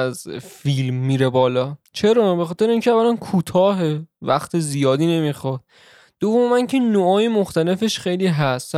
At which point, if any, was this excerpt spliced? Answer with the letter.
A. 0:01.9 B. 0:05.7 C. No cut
A